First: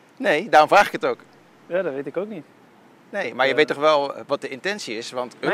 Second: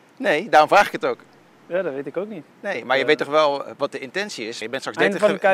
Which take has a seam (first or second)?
second